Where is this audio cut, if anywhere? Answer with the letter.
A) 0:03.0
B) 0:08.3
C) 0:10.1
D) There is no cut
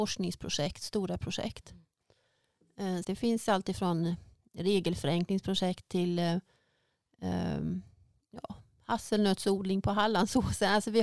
A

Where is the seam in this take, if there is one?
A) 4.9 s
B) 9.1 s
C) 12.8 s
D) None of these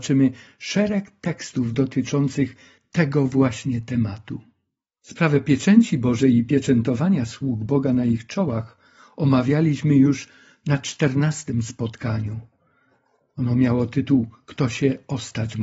A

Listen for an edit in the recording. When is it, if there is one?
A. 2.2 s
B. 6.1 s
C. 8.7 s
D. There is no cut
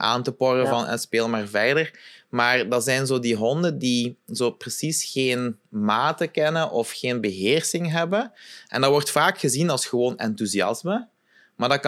D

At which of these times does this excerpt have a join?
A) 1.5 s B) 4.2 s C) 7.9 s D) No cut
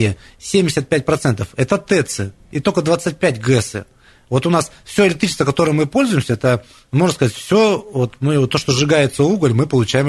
D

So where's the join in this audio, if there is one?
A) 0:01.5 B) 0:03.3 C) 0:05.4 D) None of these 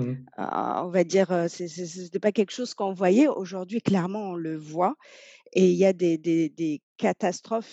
D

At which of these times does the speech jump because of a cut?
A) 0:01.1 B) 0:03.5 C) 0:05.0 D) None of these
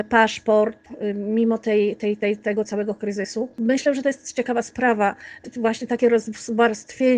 D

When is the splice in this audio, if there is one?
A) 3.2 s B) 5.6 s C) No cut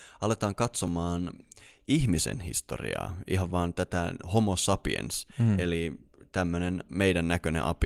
C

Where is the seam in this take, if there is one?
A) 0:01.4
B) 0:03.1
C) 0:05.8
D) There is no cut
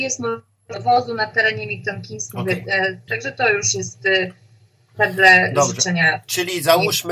B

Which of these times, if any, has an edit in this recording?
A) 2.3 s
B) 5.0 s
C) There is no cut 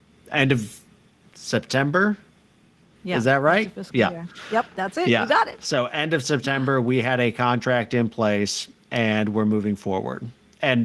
C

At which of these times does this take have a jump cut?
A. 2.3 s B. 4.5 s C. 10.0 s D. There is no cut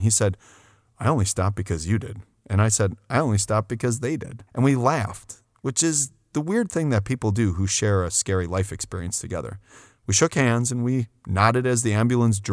B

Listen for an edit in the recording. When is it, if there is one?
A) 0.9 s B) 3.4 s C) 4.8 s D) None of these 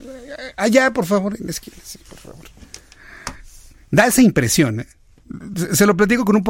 D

